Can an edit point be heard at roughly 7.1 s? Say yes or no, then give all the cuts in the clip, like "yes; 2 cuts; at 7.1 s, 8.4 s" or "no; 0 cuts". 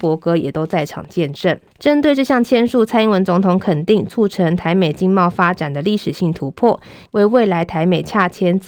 yes; 2 cuts; at 1.7 s, 7.1 s